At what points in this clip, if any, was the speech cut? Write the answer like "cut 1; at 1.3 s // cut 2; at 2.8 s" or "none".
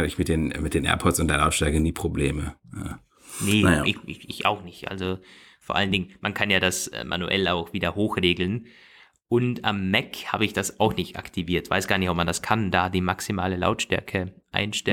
none